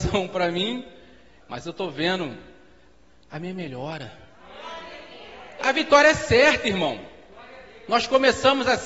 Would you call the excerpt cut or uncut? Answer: cut